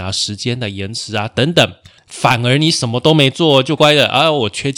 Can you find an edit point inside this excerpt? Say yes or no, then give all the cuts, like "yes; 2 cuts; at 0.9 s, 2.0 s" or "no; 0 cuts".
yes; 2 cuts; at 2.0 s, 3.8 s